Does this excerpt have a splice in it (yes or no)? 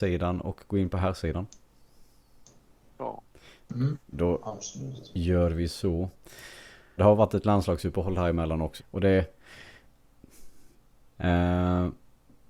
yes